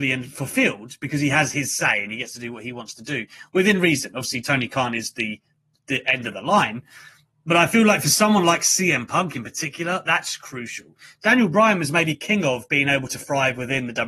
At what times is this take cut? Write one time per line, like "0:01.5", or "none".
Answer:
none

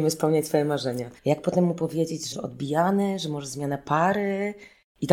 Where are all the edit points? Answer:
0:01.2
0:02.3

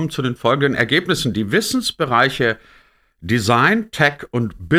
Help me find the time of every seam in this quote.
none

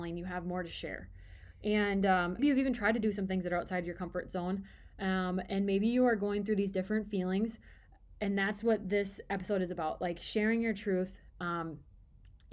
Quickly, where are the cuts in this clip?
0:02.4

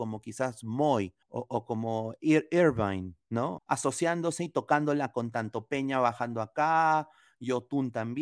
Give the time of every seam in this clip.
0:01.2
0:03.6

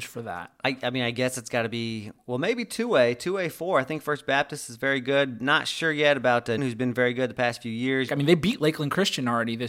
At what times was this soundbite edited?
0:06.6
0:08.1

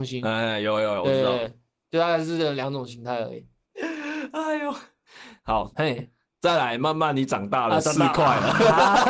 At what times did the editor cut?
0:03.6
0:05.7

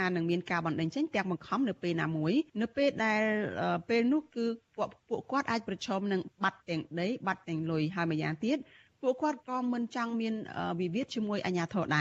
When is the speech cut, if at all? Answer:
0:02.5

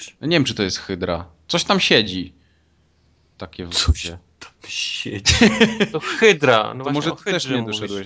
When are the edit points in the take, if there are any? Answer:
none

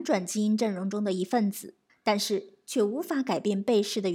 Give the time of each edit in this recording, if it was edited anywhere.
0:01.9

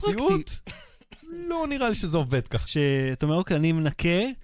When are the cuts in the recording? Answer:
0:02.7

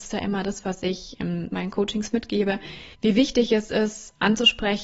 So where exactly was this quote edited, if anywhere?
0:02.9

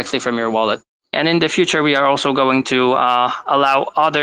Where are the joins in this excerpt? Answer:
0:01.1

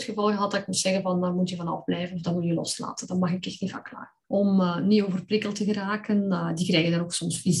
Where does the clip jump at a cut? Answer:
0:04.2

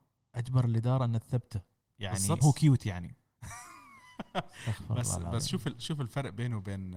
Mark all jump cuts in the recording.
0:02.4

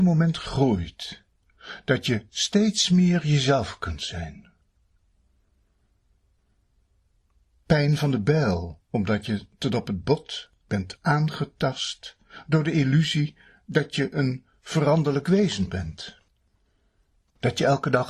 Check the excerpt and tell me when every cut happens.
0:07.5
0:08.8

